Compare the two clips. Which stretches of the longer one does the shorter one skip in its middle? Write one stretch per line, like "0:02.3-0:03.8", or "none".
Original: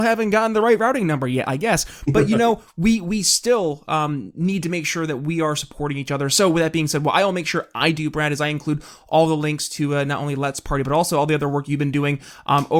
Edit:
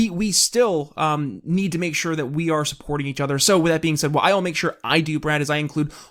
none